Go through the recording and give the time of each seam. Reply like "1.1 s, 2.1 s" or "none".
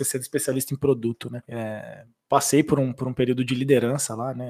1.4 s